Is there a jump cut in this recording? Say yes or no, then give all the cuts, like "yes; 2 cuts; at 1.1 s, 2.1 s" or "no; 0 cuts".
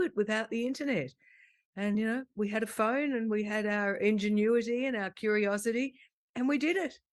no; 0 cuts